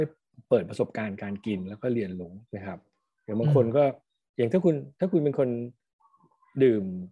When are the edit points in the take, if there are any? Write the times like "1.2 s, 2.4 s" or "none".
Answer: 2.5 s